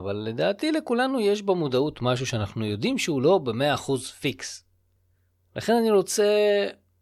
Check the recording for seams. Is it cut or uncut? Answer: uncut